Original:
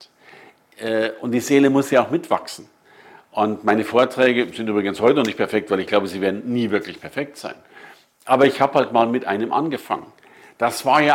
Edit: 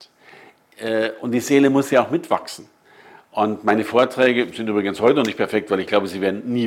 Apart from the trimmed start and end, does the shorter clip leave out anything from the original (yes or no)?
no